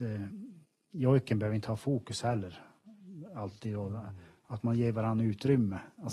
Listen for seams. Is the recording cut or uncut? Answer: uncut